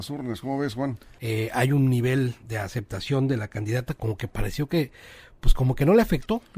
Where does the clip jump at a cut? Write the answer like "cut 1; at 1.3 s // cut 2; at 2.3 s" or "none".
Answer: cut 1; at 1.2 s // cut 2; at 2.4 s